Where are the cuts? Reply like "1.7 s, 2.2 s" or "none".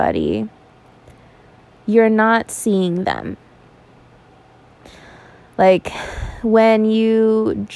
none